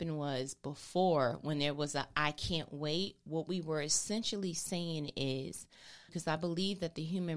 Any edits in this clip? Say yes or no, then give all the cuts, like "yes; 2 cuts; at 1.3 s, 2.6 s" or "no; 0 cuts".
yes; 1 cut; at 6.1 s